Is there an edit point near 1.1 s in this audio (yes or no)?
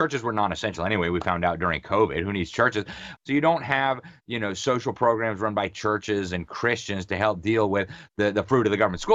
no